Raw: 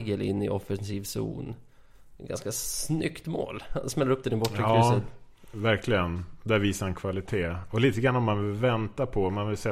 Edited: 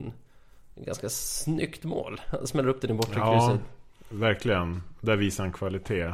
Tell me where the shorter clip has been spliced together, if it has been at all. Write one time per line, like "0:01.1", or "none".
none